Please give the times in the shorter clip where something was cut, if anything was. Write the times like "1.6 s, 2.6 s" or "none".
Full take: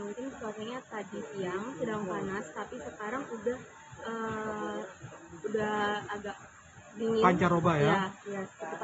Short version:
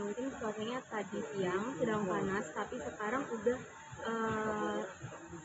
none

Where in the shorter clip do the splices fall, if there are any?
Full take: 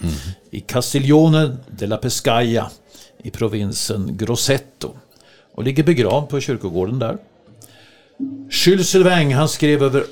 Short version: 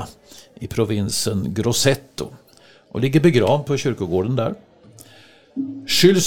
none

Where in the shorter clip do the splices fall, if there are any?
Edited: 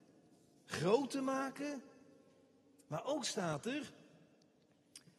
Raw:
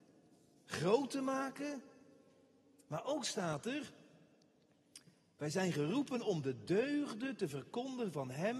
none

